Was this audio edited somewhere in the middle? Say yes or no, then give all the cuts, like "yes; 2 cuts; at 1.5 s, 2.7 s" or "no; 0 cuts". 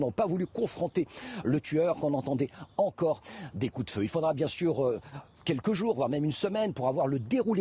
yes; 1 cut; at 1.9 s